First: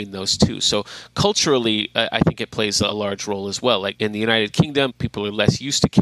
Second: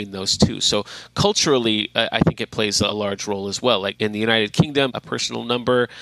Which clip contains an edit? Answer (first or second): second